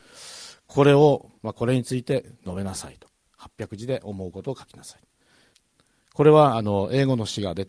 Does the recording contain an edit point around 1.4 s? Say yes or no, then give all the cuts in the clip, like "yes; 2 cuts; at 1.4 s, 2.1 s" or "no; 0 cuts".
yes; 1 cut; at 1.4 s